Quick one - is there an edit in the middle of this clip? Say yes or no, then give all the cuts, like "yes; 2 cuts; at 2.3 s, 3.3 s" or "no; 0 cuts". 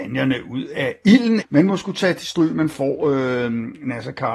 yes; 1 cut; at 1.4 s